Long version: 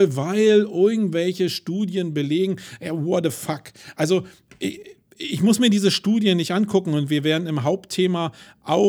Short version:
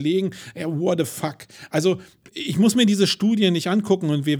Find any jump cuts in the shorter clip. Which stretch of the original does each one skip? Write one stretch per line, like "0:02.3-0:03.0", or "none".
0:04.5-0:05.1